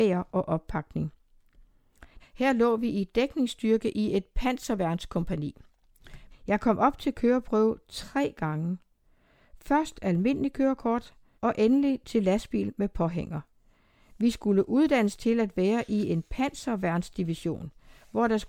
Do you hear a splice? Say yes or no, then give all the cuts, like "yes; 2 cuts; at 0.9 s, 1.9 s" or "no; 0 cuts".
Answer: yes; 3 cuts; at 2.2 s, 6.3 s, 11.4 s